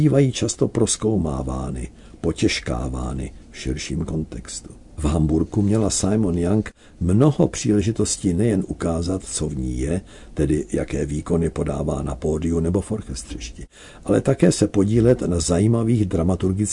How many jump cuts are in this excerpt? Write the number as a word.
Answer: one